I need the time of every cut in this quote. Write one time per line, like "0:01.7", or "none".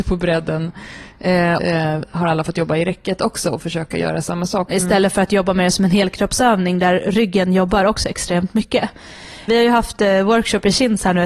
0:01.6
0:04.7
0:09.5